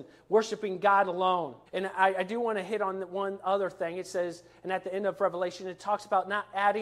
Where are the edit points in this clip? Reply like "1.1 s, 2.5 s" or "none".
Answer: 1.7 s

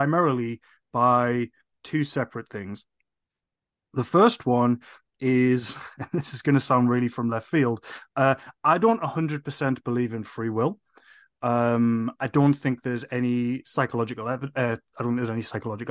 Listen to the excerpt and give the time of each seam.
none

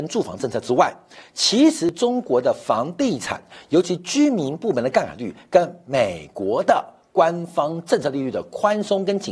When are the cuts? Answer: none

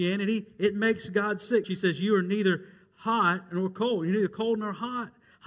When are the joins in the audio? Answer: 1.6 s

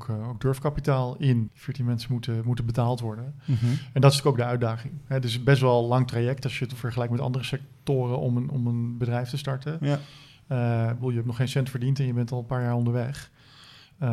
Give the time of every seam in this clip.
1.5 s

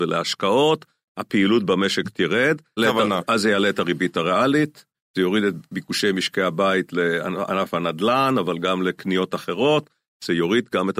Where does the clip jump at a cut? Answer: 2.8 s, 4.9 s

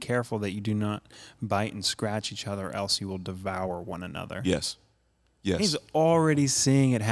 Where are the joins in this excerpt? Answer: none

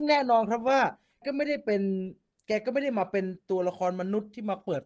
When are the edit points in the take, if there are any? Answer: 1.2 s

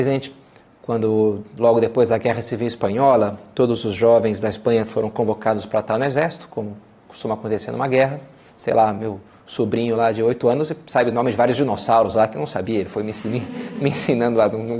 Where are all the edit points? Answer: 8.4 s

